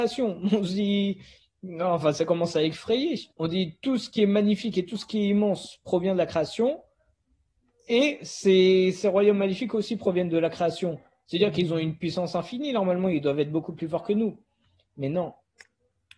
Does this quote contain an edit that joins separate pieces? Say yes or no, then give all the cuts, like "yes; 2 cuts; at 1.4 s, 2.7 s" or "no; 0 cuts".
yes; 1 cut; at 3.3 s